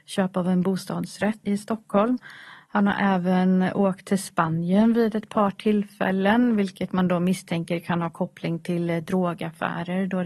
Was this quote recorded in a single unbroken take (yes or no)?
no